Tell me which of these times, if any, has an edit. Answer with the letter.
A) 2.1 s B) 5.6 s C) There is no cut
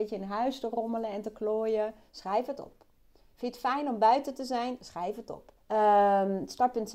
B